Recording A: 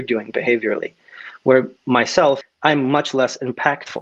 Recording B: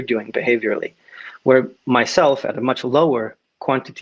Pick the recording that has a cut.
A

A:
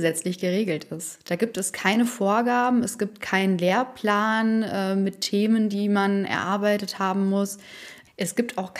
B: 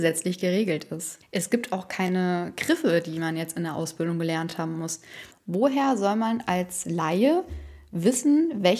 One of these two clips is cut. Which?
B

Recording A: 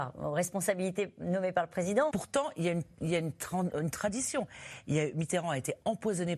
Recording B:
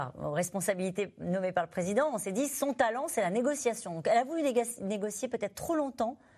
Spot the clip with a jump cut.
A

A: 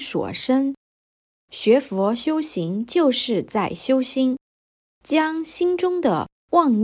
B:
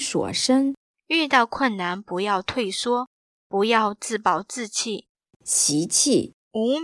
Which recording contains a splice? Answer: B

